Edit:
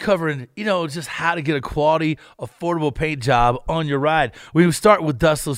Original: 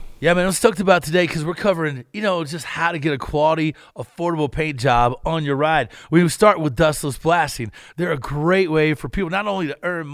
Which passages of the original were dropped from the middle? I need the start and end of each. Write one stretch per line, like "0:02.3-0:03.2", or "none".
none